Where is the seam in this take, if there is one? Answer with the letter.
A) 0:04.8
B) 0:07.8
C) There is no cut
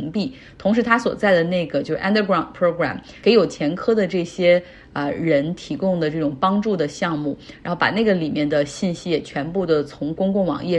C